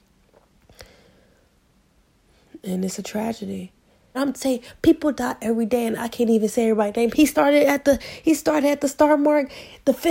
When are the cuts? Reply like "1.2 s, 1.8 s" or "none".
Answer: 4.1 s, 7.1 s